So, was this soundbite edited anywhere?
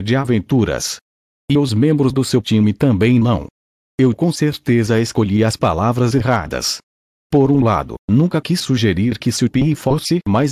no; 0 cuts

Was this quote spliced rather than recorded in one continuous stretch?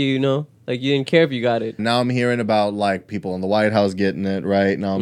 yes; 1 cut; at 1.8 s

